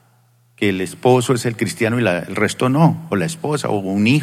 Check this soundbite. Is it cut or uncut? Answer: uncut